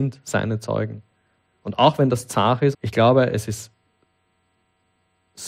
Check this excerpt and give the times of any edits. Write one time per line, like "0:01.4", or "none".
0:02.7